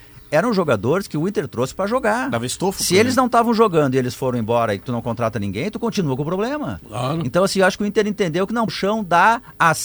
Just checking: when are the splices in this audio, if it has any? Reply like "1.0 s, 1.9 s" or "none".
8.7 s